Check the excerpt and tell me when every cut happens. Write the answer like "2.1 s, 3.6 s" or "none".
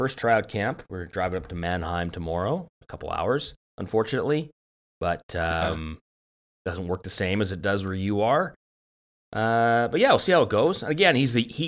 2.8 s